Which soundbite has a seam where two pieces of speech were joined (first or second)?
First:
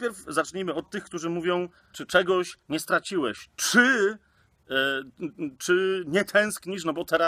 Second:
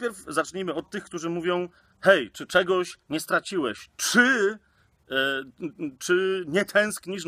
first